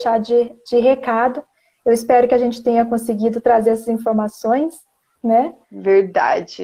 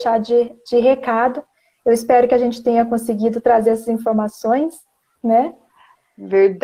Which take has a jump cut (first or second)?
first